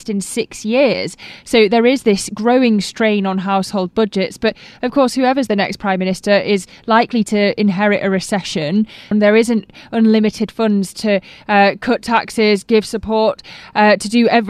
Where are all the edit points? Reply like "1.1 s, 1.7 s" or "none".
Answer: 9.1 s